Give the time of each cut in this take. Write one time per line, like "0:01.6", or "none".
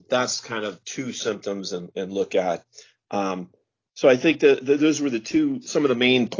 none